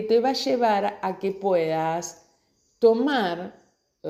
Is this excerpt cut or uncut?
uncut